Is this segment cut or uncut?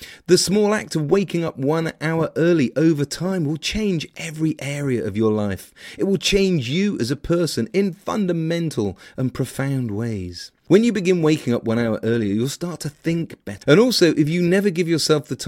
cut